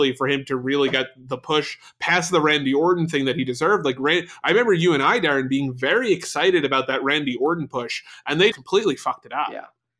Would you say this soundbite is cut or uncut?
cut